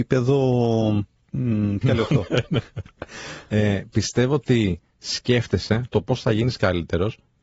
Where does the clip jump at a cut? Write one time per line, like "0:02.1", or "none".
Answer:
0:01.8